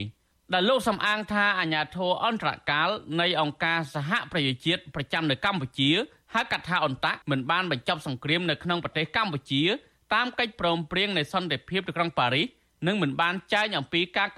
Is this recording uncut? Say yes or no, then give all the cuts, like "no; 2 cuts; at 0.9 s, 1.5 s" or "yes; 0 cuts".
no; 1 cut; at 7.2 s